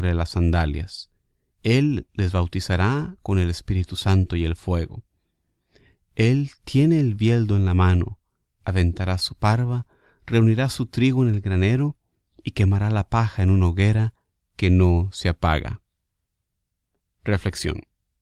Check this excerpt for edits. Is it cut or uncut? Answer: cut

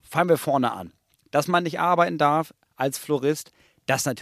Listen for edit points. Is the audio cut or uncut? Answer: uncut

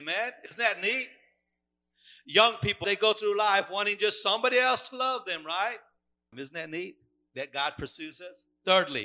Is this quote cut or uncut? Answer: cut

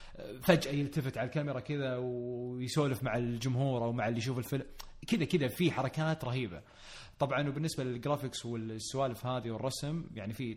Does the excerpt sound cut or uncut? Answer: uncut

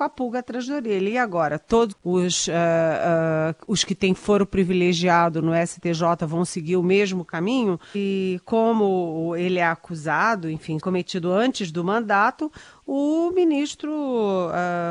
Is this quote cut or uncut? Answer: cut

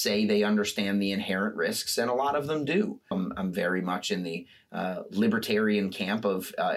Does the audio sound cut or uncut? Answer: cut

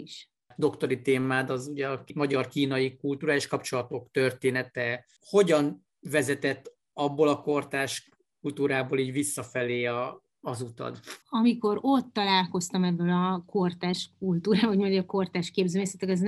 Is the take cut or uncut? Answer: cut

